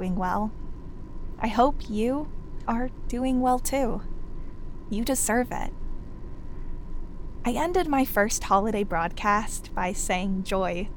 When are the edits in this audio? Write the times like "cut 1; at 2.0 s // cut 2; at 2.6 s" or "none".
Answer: cut 1; at 2.7 s